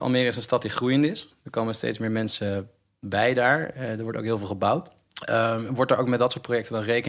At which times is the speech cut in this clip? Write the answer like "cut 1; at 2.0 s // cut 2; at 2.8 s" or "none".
none